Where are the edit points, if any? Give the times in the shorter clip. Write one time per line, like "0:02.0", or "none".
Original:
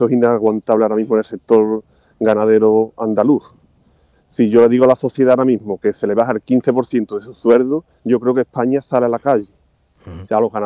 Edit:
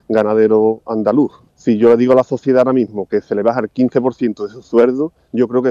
0:01.5